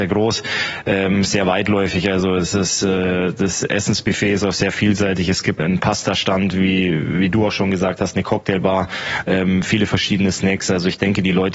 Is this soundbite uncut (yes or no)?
no